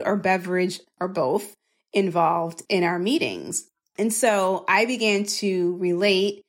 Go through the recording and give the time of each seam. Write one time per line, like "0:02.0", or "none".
none